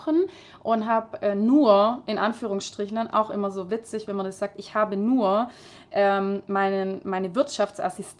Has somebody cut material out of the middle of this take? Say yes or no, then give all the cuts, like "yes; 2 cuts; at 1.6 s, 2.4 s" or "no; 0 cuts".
no; 0 cuts